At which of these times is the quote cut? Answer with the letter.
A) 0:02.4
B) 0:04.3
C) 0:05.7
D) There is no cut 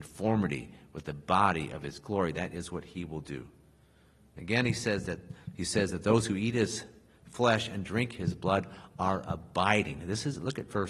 D